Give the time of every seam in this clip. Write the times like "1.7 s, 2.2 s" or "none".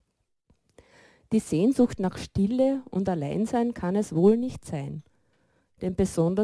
none